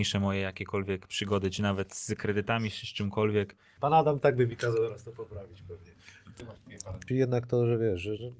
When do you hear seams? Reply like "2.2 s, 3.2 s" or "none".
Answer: 3.8 s, 7.1 s